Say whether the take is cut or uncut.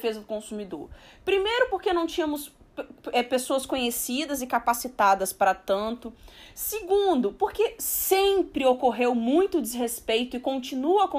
uncut